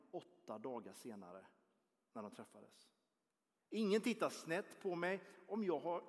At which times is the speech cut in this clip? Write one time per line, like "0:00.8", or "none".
0:03.6